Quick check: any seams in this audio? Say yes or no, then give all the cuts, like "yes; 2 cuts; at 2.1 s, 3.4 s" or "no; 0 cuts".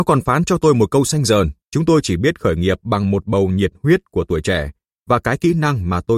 yes; 1 cut; at 1.7 s